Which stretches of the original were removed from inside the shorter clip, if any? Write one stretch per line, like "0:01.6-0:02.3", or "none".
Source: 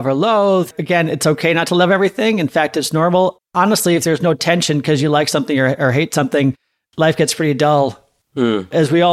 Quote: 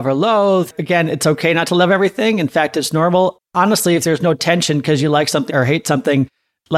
0:05.5-0:05.8